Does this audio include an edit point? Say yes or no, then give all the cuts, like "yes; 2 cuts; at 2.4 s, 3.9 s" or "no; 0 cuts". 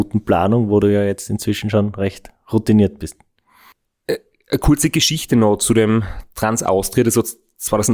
no; 0 cuts